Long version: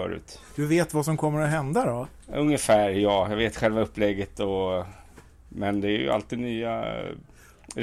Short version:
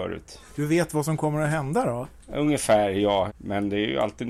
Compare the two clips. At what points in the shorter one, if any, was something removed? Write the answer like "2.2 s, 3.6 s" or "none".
3.3 s